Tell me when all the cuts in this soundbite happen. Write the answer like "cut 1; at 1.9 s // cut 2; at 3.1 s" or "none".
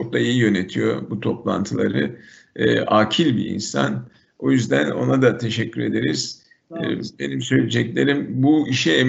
none